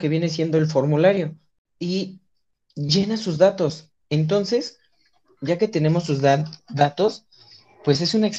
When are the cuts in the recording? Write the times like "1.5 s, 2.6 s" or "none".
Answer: none